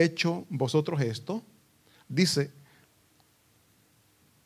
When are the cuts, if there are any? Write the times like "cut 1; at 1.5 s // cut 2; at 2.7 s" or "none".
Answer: cut 1; at 2.0 s